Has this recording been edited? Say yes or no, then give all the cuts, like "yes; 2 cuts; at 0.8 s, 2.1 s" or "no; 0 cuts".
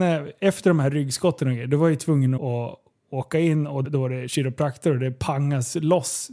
yes; 2 cuts; at 2.4 s, 3.8 s